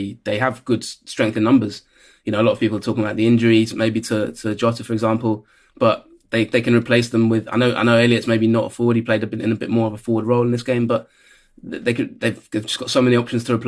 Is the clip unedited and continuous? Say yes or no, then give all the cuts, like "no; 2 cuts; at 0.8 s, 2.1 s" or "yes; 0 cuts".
yes; 0 cuts